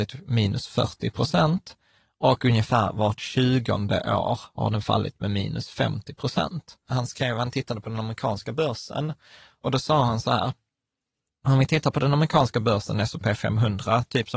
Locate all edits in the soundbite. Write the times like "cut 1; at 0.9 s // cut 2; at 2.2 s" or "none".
cut 1; at 6.9 s